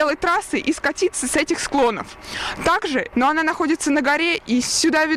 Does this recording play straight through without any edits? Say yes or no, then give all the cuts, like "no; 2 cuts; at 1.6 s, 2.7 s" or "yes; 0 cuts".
no; 1 cut; at 3.1 s